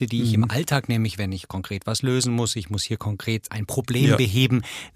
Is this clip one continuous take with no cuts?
no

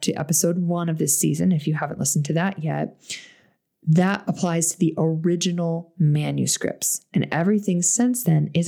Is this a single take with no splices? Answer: yes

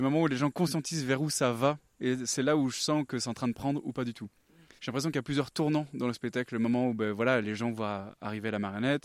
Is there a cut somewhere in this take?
yes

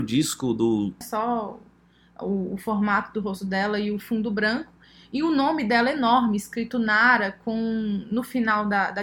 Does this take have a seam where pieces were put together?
yes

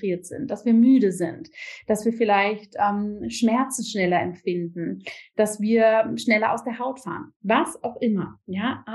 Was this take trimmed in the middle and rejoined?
no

